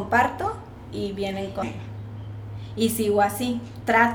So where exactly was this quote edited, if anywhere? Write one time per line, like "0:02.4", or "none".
0:01.6